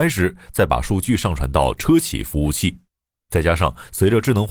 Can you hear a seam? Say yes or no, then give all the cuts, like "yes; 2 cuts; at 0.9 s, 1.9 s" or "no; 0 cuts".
yes; 1 cut; at 3.3 s